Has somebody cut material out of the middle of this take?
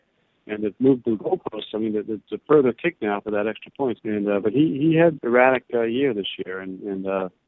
yes; 2 cuts; at 4.0 s, 5.2 s

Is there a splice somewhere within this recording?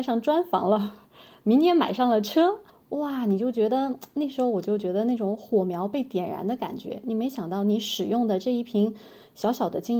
no; 0 cuts

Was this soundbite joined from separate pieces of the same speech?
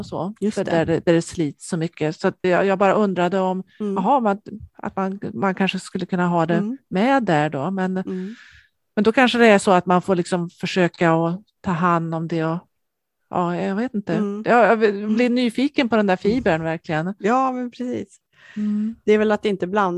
yes; 1 cut; at 2.4 s

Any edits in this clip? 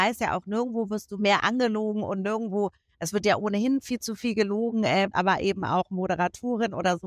yes; 1 cut; at 5.1 s

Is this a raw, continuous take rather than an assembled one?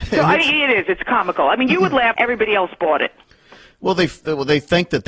no; 1 cut; at 2.1 s

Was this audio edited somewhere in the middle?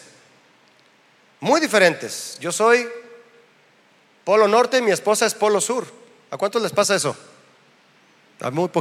no; 0 cuts

